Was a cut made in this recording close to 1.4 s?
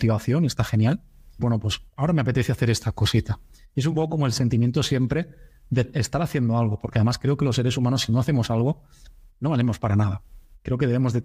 yes; 1 cut; at 1.4 s

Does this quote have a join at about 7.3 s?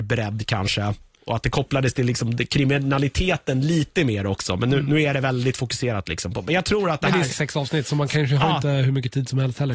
yes; 1 cut; at 7.3 s

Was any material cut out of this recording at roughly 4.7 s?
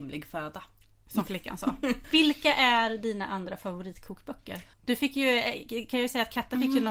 yes; 1 cut; at 4.7 s

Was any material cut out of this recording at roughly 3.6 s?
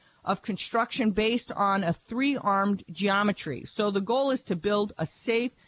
no; 0 cuts

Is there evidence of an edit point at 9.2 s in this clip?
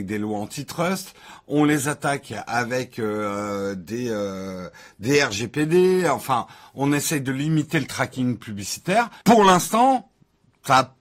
yes; 1 cut; at 9.2 s

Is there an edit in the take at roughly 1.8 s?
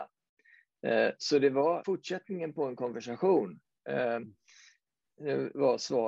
yes; 1 cut; at 1.8 s

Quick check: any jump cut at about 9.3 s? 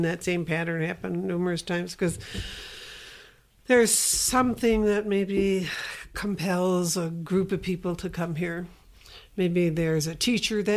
no; 0 cuts

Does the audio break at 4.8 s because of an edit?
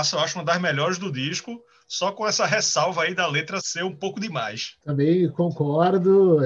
no; 1 cut; at 3.6 s

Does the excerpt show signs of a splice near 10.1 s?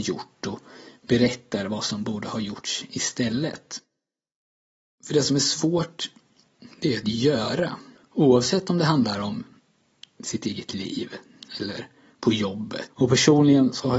no; 2 cuts; at 8.0 s, 12.9 s

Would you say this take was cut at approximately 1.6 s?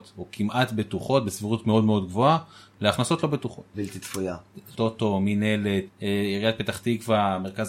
no; 3 cuts; at 3.7 s, 4.7 s, 5.9 s

